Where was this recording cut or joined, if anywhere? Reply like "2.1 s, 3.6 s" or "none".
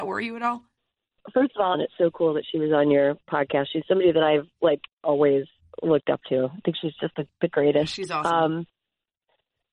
1.7 s

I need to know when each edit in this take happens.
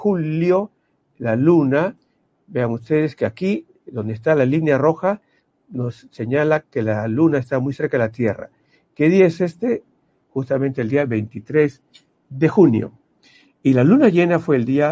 none

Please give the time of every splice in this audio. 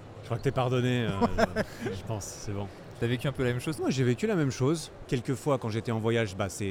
3.8 s, 5.1 s

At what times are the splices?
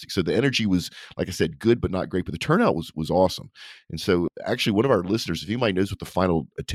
none

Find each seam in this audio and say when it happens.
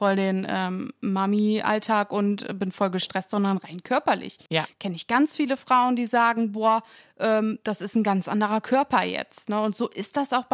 none

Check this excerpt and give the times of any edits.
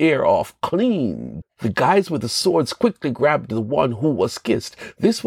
1.4 s

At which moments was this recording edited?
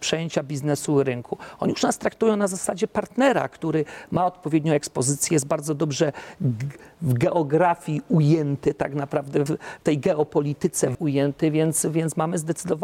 9.5 s, 10.9 s

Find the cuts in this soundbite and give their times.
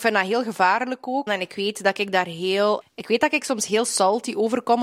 1.3 s, 2.8 s

